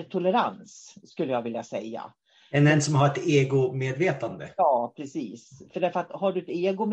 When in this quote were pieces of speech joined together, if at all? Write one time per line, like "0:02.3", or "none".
none